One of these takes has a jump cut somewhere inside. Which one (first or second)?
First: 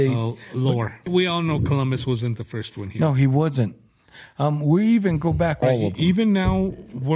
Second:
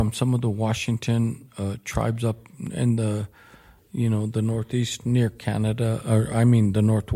first